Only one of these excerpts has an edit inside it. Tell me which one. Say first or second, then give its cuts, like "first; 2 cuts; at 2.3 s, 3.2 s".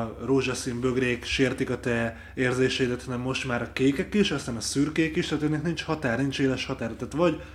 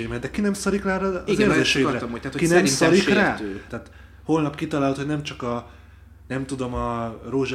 second; 1 cut; at 3.7 s